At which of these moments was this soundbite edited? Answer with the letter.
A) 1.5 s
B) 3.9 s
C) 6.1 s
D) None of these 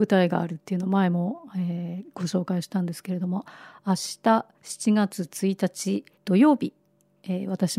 C